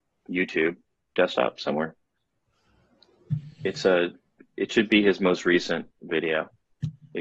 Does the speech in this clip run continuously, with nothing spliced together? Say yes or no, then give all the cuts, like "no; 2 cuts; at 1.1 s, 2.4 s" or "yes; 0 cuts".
yes; 0 cuts